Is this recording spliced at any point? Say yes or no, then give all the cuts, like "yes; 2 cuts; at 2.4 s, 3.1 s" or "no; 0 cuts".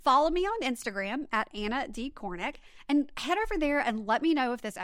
no; 0 cuts